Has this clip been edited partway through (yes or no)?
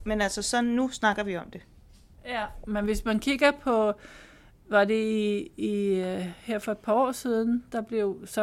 no